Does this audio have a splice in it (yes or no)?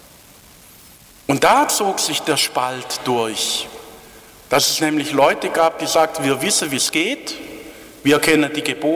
no